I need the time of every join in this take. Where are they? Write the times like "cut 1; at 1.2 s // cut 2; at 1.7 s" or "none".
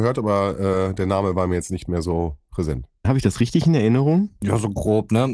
cut 1; at 3.0 s